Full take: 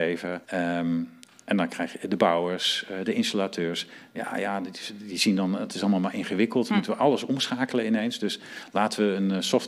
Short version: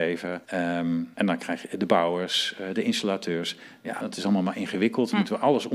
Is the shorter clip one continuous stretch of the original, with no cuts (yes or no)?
no